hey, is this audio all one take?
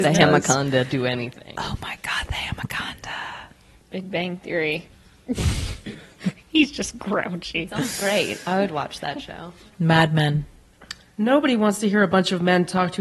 no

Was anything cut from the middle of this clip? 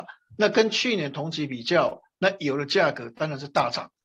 no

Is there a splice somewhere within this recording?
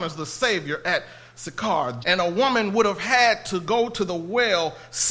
yes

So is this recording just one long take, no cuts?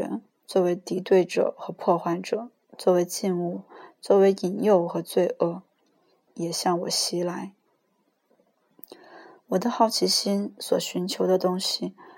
no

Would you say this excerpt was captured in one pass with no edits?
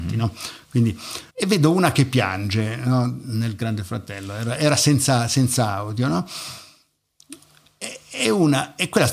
no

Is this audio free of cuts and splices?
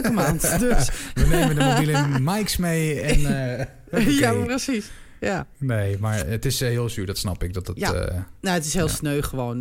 yes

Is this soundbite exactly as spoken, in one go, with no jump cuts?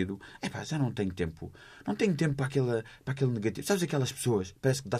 yes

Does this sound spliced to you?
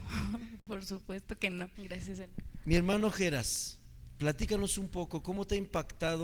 yes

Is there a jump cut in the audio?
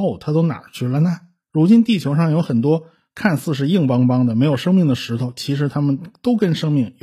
yes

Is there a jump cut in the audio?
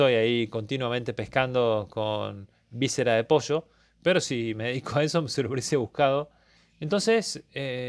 yes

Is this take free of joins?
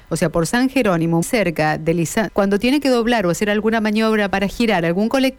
no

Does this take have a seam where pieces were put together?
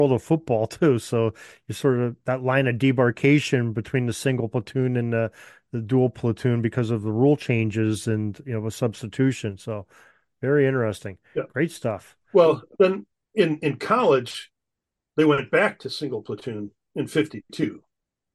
no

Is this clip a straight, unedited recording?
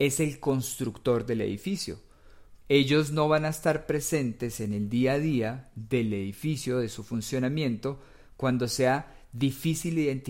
no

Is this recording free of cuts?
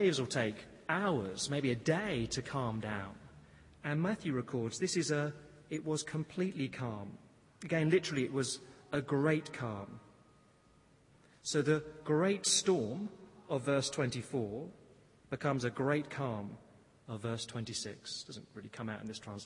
yes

